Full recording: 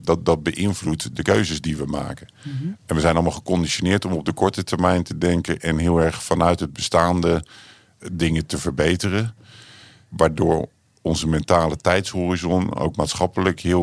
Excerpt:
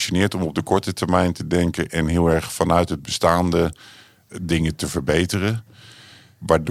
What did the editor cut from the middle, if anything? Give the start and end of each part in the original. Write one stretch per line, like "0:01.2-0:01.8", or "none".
none